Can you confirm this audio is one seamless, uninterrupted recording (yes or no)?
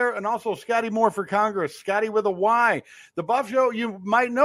yes